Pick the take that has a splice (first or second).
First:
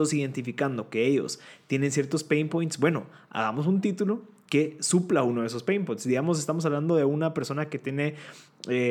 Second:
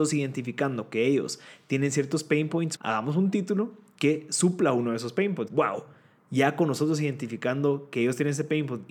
second